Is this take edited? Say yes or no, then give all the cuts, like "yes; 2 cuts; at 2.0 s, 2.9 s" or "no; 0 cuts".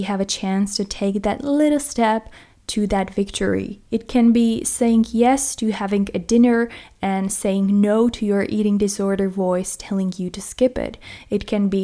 no; 0 cuts